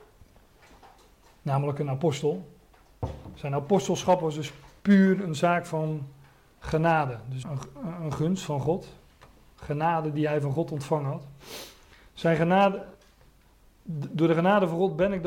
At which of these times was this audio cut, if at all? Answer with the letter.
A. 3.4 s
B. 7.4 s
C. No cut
B